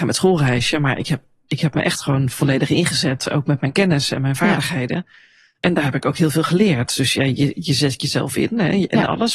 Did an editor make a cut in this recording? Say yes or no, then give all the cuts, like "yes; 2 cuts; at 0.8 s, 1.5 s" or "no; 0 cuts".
no; 0 cuts